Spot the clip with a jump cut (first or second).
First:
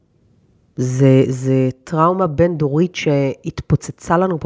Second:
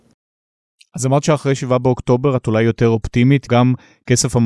second